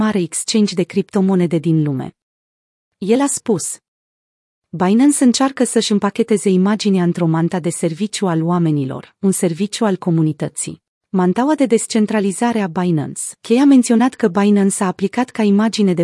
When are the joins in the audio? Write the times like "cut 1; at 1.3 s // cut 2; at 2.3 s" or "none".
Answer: cut 1; at 11.0 s // cut 2; at 13.4 s

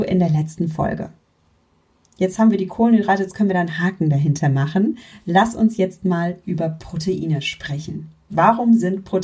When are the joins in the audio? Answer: none

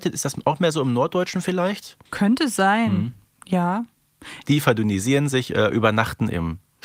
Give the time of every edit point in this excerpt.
cut 1; at 2.1 s // cut 2; at 4.4 s

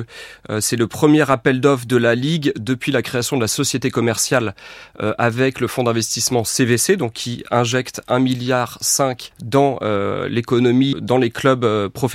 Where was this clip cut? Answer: cut 1; at 9.3 s // cut 2; at 10.9 s

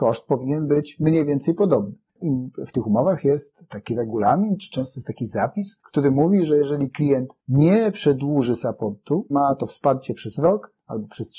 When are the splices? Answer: cut 1; at 2.2 s // cut 2; at 9.3 s

